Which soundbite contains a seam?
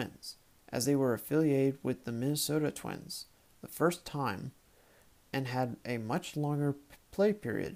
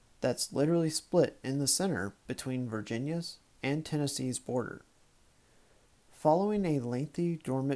second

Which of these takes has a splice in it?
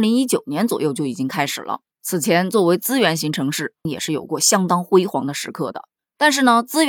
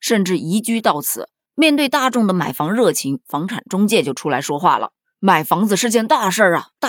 second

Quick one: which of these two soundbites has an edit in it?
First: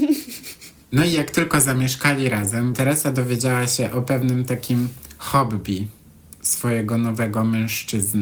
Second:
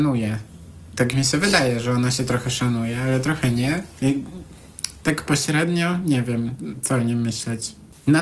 first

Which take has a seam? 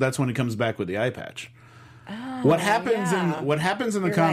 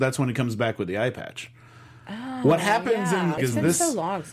second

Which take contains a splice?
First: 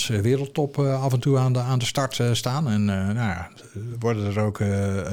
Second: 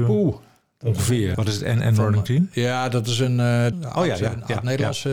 second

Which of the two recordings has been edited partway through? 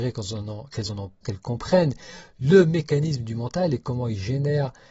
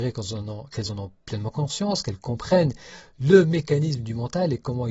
first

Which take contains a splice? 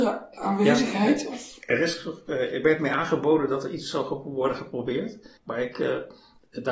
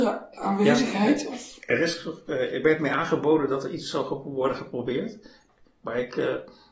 first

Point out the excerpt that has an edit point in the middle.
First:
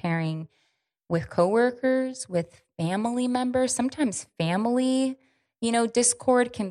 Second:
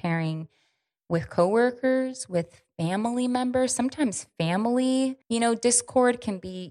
second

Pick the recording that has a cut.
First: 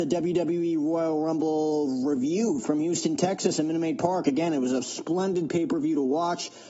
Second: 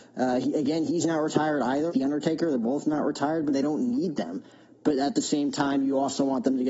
second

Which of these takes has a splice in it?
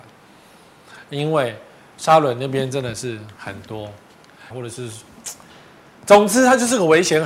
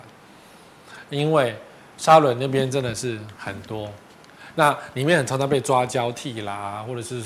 first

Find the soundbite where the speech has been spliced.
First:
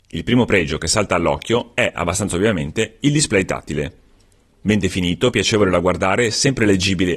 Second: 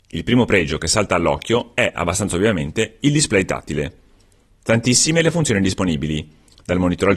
second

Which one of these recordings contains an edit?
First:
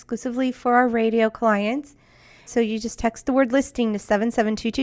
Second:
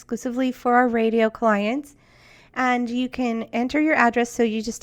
first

